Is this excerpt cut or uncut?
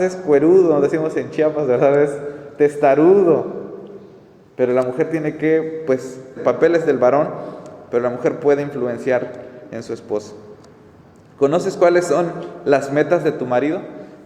cut